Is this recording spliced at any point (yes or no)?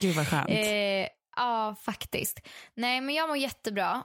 no